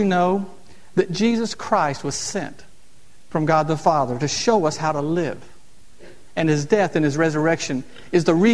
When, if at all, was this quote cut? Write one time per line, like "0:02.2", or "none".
none